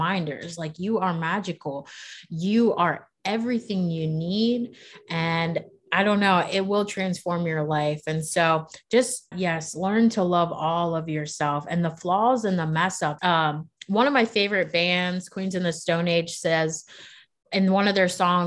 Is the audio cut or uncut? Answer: cut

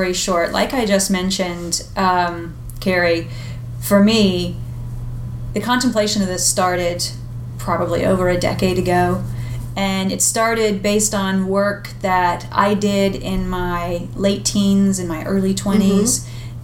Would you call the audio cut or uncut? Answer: uncut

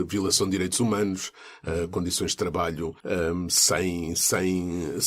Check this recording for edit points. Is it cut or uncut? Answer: cut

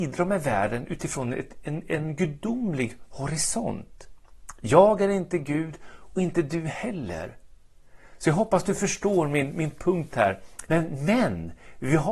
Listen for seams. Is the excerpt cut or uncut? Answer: cut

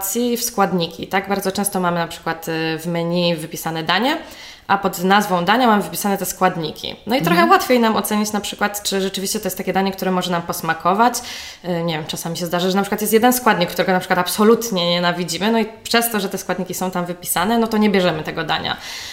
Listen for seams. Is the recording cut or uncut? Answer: uncut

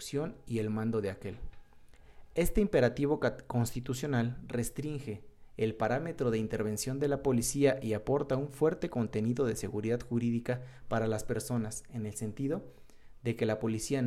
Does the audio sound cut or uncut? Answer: uncut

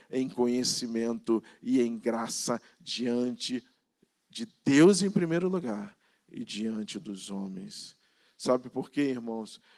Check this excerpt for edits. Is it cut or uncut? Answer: uncut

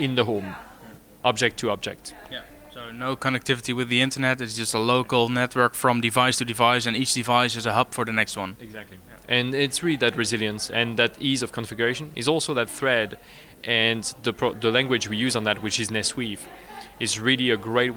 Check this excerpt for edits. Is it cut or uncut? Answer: uncut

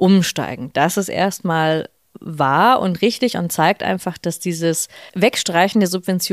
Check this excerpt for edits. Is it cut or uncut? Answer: cut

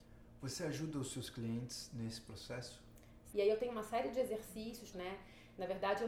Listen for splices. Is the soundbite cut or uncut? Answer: cut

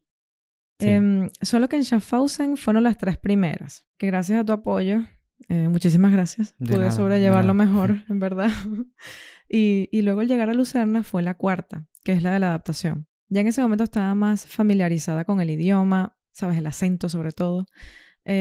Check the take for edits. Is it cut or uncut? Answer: uncut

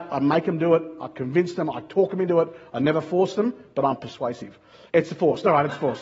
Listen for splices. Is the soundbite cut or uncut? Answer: cut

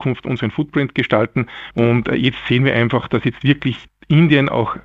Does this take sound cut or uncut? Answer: cut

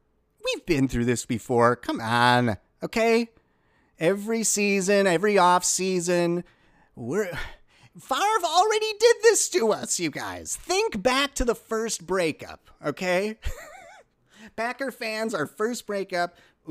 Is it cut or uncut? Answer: uncut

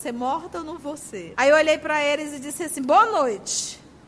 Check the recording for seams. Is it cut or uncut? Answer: cut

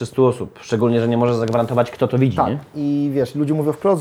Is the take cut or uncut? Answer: uncut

